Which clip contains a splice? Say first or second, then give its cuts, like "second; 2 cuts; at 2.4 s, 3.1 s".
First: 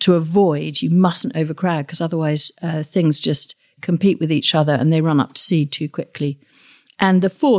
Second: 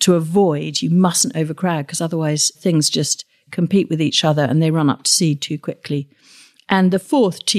second; 1 cut; at 2.5 s